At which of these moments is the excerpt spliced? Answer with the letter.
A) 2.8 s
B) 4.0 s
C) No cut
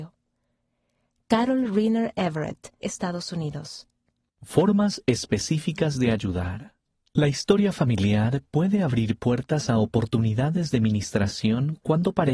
A